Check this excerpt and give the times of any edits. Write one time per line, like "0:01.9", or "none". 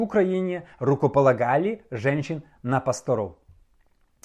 none